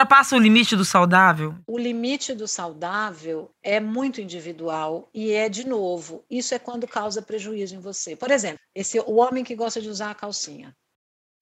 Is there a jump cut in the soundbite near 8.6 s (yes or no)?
yes